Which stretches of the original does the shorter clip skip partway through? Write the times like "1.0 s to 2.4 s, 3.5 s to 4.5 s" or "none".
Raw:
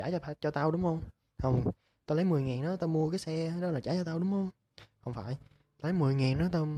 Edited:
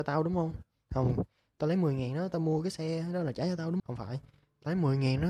4.3 s to 5.0 s